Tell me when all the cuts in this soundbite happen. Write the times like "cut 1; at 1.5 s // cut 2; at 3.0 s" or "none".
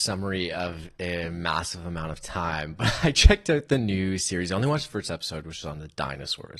none